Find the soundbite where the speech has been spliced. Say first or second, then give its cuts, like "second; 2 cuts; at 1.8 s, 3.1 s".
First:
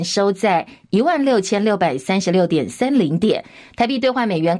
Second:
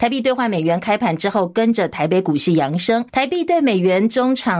second; 1 cut; at 3.1 s